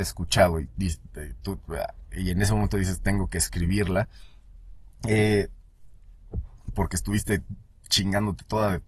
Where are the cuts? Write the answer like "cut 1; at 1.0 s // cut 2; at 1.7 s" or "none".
none